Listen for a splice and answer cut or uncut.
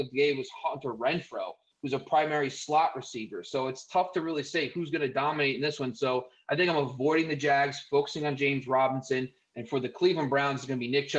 uncut